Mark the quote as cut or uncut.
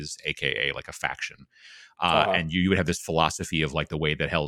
uncut